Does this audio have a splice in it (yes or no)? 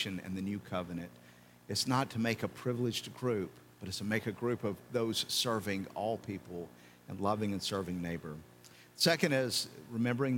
no